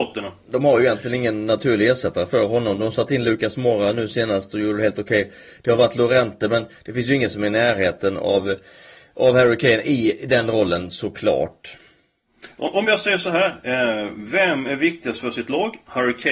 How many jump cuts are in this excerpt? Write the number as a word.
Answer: zero